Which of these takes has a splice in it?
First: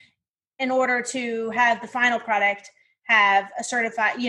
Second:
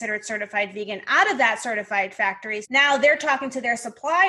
second; 1 cut; at 2.6 s

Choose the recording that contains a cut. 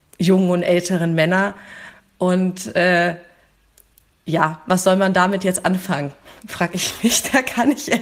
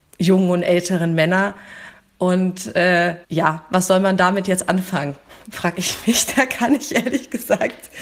second; 1 cut; at 3.2 s

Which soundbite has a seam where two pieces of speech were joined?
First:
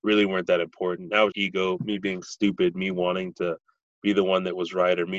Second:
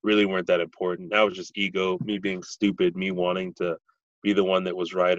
first; 1 cut; at 1.3 s

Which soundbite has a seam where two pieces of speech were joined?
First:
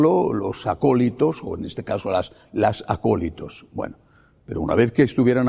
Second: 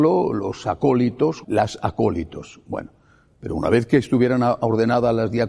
second; 1 cut; at 1.4 s

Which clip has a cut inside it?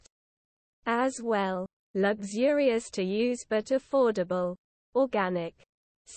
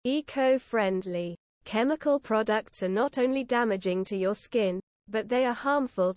first; 1 cut; at 1.8 s

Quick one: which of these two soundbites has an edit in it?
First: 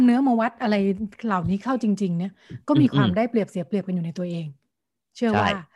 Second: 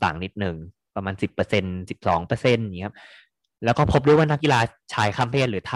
second; 1 cut; at 4.4 s

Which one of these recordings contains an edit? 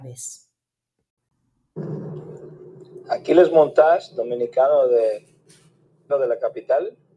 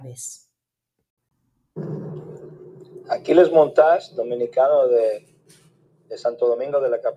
first; 1 cut; at 6.1 s

